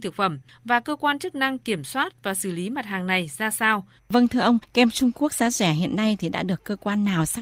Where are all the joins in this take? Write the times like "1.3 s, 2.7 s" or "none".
4.0 s

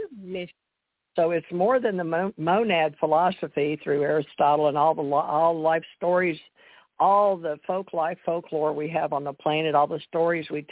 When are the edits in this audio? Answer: 1.2 s

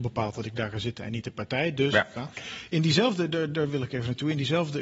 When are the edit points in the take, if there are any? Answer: 2.1 s

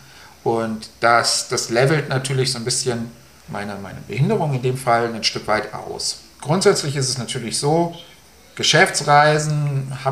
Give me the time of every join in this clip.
none

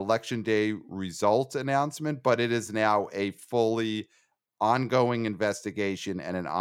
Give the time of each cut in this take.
none

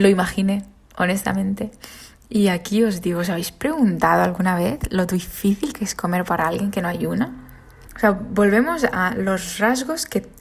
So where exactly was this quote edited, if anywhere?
7.9 s

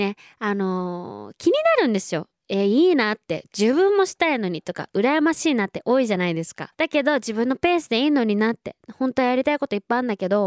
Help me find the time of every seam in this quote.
6.7 s

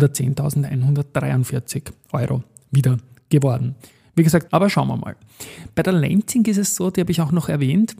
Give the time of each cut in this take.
4.5 s

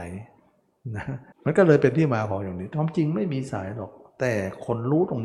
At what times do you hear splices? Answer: 1.3 s

